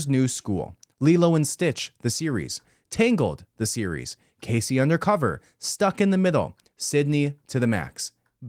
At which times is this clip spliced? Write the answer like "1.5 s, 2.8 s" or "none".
none